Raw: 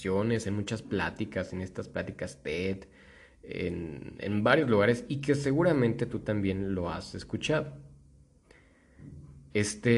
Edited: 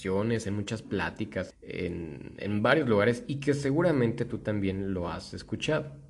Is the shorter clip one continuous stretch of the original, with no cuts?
no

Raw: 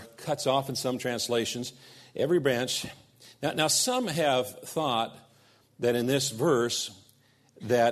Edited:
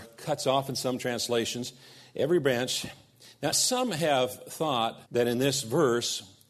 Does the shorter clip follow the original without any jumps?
no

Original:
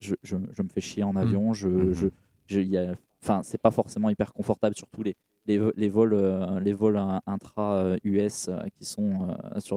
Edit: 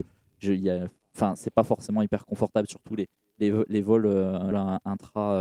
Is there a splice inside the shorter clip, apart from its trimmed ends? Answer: yes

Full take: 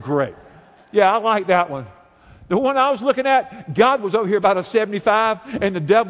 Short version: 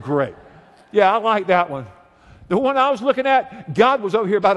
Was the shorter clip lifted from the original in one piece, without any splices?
yes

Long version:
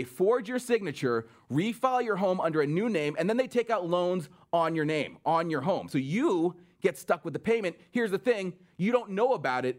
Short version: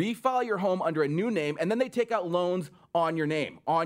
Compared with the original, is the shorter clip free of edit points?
yes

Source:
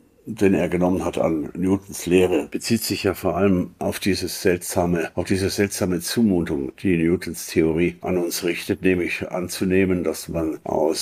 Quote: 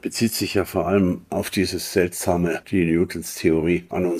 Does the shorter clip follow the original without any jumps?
no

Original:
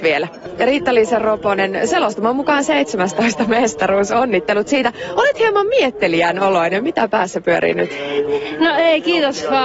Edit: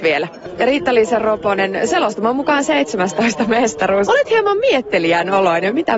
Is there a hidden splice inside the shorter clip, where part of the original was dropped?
yes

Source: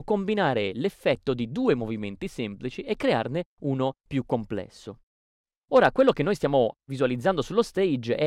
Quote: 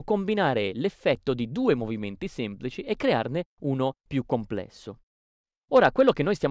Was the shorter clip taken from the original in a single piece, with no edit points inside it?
yes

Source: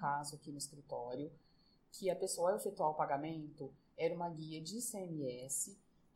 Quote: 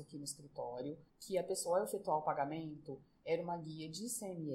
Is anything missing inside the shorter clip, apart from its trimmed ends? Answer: yes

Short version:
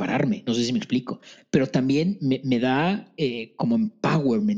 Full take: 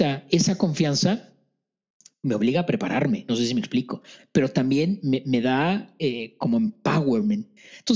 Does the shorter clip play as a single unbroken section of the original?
yes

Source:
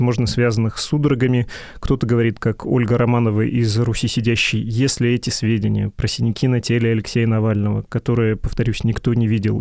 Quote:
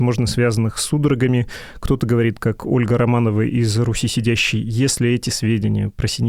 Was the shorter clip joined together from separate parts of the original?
no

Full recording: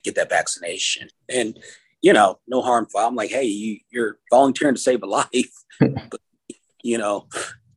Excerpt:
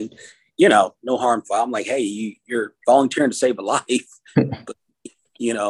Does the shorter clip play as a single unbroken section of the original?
yes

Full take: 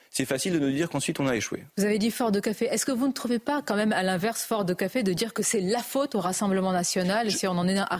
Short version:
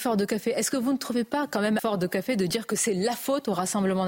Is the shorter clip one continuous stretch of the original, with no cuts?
no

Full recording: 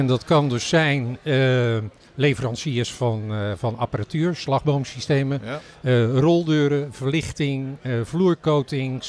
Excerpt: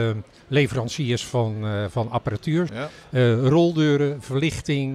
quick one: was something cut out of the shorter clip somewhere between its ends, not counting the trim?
yes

